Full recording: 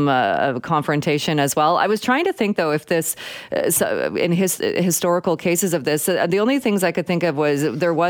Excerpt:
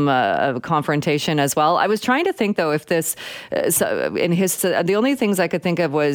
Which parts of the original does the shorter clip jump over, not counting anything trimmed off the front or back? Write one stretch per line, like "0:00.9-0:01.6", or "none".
0:04.6-0:06.0